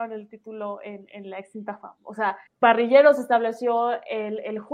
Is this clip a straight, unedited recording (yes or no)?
no